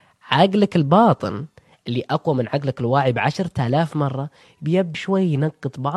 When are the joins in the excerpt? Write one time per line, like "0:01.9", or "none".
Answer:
0:04.9